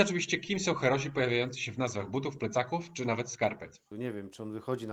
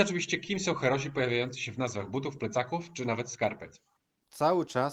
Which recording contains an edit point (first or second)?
first